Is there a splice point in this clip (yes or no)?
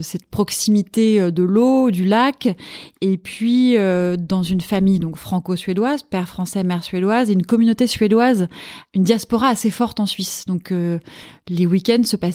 no